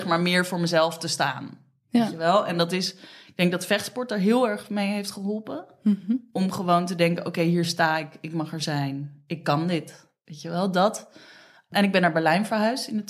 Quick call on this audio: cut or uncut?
uncut